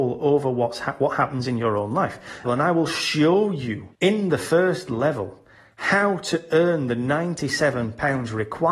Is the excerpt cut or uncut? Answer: cut